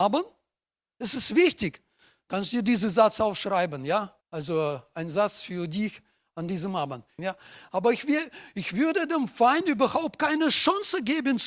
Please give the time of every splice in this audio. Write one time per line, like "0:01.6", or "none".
0:04.2
0:07.2